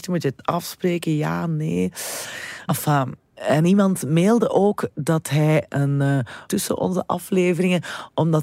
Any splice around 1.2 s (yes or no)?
no